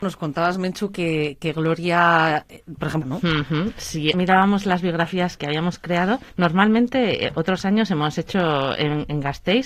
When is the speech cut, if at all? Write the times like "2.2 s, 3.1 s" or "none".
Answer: 3.0 s, 5.4 s

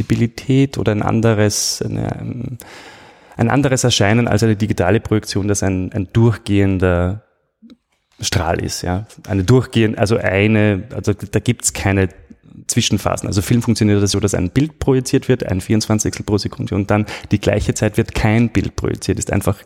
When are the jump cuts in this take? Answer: none

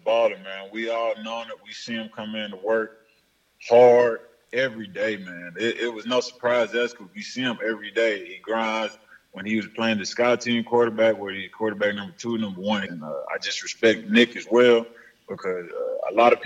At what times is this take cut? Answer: 12.9 s

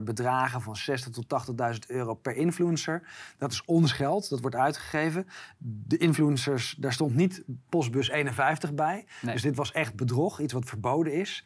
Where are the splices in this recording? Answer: none

